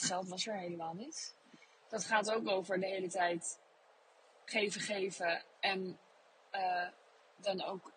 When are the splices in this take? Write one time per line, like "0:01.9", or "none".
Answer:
0:01.8